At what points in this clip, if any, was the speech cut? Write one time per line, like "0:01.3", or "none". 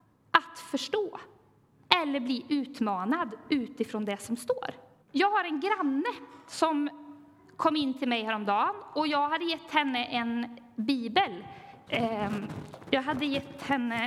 0:05.0
0:11.9